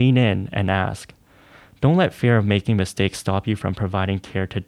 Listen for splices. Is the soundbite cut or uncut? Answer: uncut